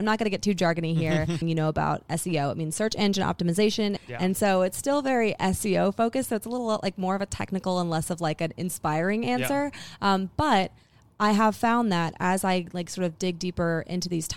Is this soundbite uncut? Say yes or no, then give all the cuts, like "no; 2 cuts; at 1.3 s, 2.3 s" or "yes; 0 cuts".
no; 2 cuts; at 1.4 s, 4.0 s